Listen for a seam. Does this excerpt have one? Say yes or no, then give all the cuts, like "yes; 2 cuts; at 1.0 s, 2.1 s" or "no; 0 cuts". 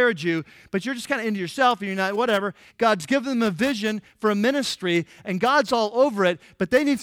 yes; 2 cuts; at 2.7 s, 5.2 s